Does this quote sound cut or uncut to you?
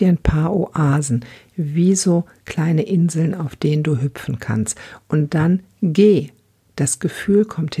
uncut